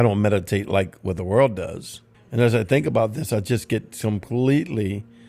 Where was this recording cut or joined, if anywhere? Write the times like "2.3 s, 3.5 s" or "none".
2.1 s